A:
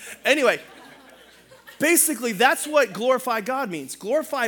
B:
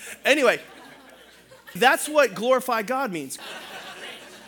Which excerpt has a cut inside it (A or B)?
B